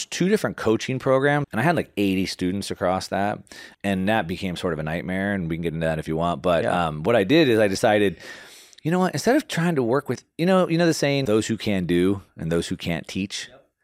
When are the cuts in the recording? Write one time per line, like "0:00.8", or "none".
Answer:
0:01.4
0:11.3